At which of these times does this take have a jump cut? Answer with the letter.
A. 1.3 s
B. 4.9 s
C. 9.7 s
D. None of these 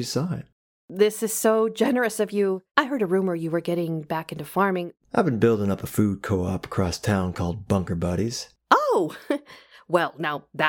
D